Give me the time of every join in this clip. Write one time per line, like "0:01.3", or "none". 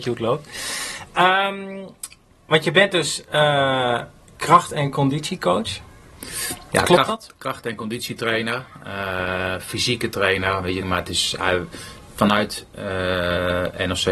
0:10.8